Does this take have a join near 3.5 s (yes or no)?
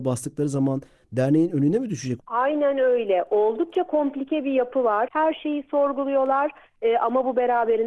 no